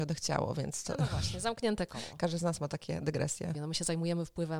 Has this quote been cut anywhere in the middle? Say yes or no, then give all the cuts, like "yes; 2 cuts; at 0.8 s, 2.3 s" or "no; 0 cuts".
yes; 1 cut; at 3.5 s